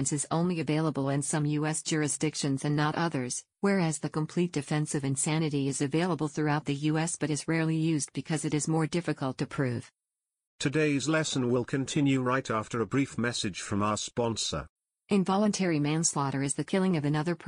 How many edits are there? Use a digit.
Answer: 1